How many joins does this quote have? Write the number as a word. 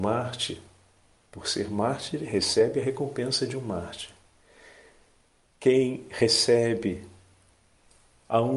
zero